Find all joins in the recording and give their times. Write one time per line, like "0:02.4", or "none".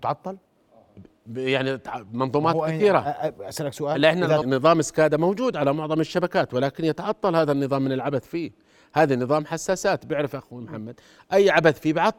0:04.4